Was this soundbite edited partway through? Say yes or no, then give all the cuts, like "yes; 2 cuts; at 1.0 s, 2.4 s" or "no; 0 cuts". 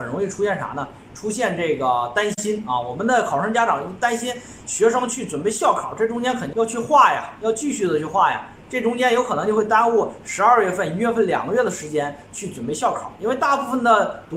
yes; 1 cut; at 6.5 s